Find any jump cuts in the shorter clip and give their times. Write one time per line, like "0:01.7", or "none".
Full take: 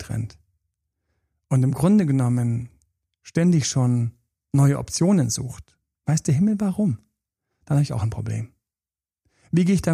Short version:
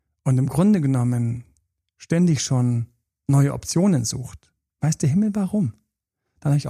none

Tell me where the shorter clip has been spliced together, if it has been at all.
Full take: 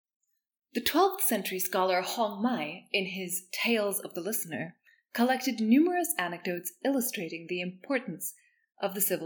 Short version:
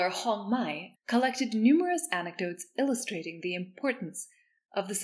0:00.9

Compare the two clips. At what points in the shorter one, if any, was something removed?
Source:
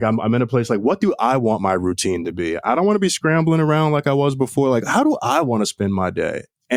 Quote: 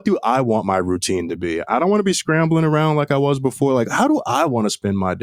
none

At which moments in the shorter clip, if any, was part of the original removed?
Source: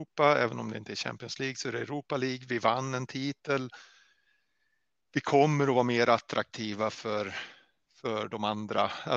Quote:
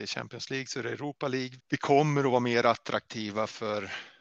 0:01.6

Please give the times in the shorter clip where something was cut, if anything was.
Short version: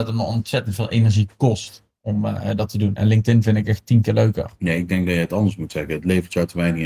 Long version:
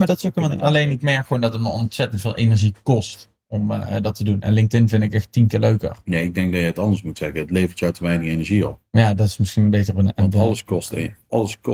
none

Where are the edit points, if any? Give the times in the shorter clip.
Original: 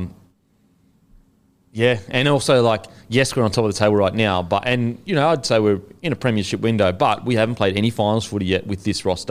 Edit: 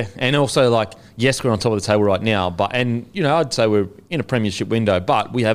none

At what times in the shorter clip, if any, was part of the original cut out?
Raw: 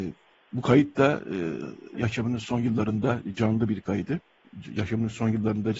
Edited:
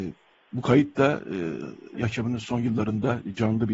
none

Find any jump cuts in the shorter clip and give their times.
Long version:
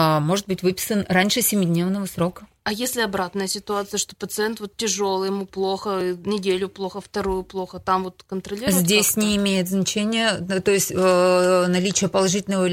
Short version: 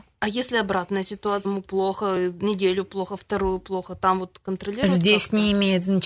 0:01.4

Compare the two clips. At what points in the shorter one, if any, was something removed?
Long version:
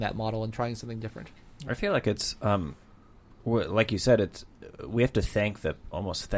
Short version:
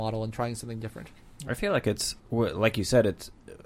0:02.2

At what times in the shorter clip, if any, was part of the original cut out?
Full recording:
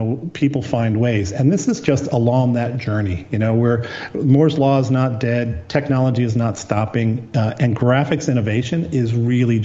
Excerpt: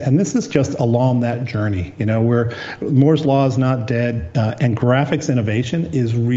0:04.3

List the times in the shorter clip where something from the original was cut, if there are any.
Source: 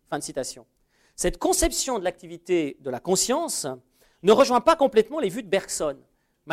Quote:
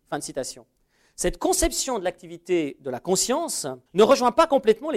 0:03.9

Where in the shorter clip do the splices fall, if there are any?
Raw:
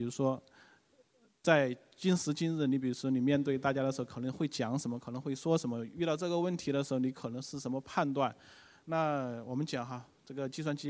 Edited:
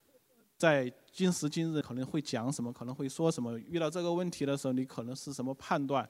0:01.8

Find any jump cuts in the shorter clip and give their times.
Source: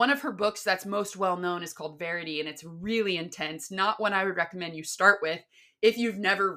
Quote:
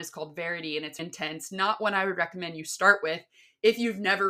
0:01.0

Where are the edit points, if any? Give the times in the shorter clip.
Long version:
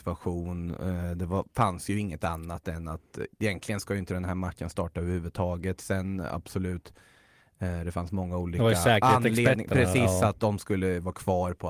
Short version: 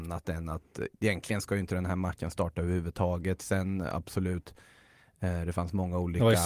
none

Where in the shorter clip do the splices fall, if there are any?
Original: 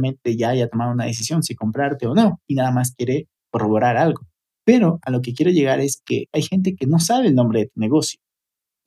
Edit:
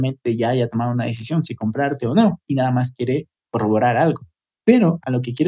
none

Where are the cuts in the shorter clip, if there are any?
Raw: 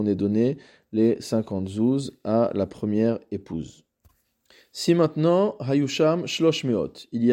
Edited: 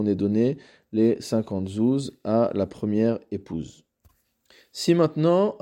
none

